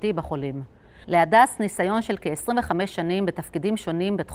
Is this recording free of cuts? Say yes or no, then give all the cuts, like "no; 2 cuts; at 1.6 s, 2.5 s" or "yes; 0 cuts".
no; 1 cut; at 1.0 s